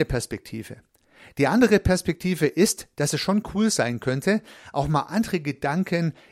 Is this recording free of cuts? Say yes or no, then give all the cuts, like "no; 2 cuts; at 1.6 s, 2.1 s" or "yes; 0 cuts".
yes; 0 cuts